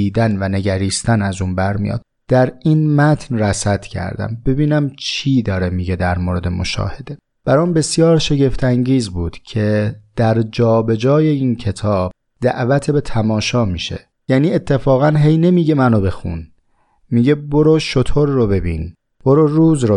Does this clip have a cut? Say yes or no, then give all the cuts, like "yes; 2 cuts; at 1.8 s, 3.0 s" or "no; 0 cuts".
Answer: no; 0 cuts